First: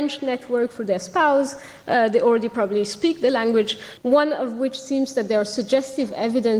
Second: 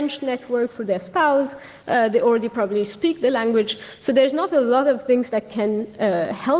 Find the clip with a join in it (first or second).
first